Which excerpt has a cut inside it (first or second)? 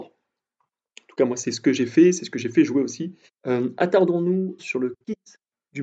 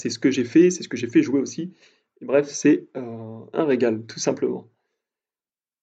first